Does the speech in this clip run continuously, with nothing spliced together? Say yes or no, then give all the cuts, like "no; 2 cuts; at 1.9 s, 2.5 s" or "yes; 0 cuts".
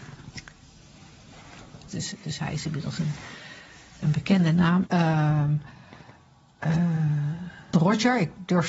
no; 3 cuts; at 1.9 s, 4.9 s, 7.7 s